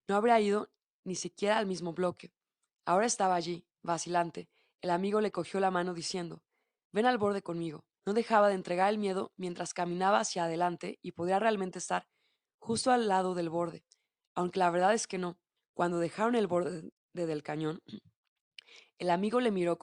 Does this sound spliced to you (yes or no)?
yes